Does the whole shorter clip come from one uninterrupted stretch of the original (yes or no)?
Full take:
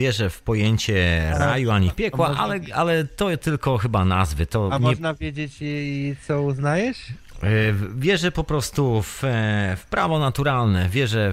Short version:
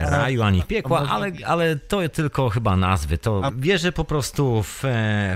no